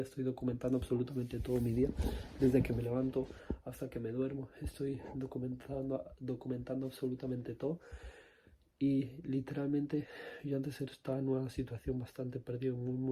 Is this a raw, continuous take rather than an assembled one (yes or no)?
yes